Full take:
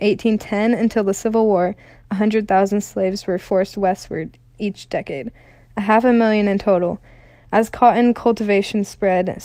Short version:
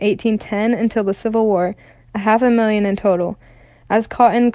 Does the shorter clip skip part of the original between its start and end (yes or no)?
yes